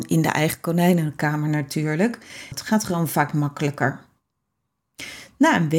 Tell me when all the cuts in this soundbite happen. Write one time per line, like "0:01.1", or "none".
0:02.5